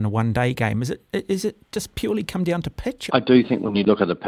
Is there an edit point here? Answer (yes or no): yes